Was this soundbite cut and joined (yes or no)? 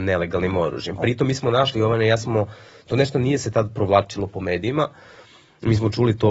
no